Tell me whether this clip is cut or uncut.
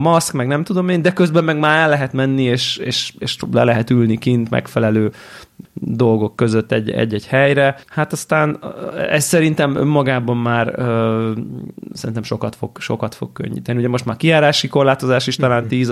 cut